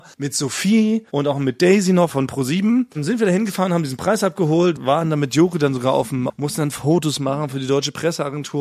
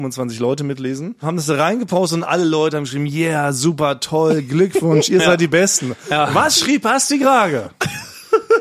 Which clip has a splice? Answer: first; 3 cuts; at 2.1 s, 4.8 s, 6.3 s

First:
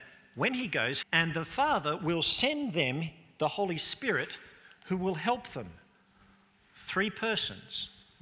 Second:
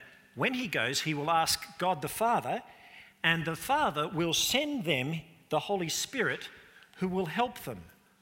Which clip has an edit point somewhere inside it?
first; 1 cut; at 1.0 s

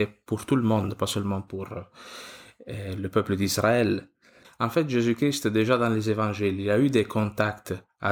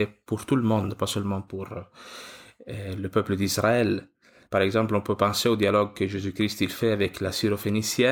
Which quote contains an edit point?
first; 1 cut; at 4.4 s

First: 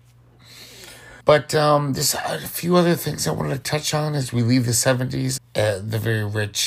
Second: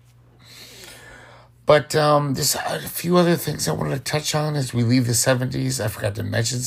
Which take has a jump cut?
first; 2 cuts; at 1.2 s, 5.4 s

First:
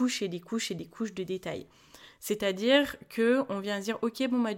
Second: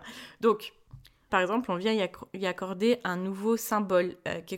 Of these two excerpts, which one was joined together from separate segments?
second; 1 cut; at 1.3 s

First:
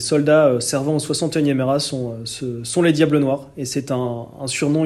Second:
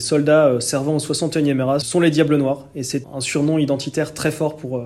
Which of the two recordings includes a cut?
second; 2 cuts; at 1.8 s, 3.0 s

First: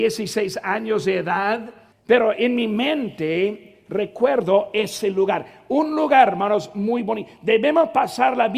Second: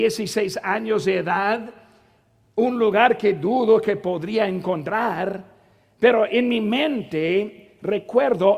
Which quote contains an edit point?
first; 1 cut; at 1.9 s

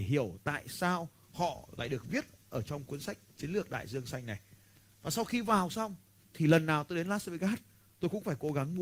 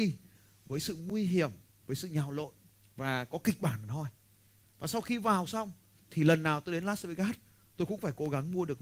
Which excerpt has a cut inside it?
second; 1 cut; at 4.6 s

